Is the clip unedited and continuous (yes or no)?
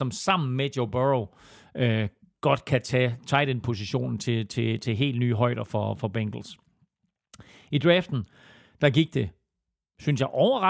yes